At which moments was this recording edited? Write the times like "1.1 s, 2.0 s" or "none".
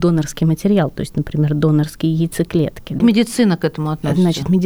3.0 s